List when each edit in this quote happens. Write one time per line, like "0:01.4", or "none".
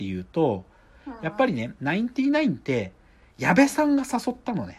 none